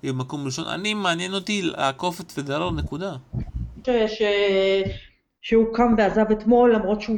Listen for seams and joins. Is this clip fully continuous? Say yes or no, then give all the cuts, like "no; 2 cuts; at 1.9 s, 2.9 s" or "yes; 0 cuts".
no; 1 cut; at 3.8 s